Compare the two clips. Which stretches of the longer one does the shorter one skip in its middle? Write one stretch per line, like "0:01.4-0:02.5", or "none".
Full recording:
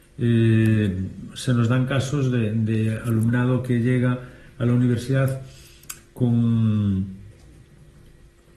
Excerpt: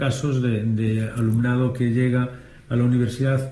none